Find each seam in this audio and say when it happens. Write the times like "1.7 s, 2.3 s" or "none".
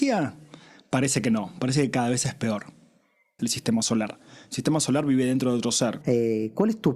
3.4 s, 6.0 s